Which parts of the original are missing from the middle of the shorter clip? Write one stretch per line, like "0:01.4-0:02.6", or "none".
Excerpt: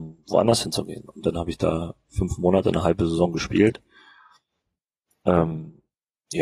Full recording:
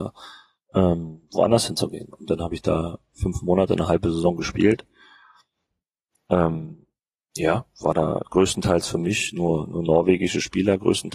none